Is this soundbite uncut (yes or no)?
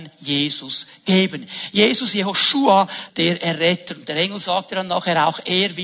no